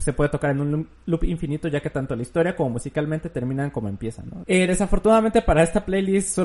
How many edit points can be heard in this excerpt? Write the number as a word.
one